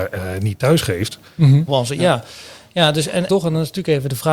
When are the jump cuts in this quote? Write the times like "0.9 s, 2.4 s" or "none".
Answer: 1.7 s, 3.3 s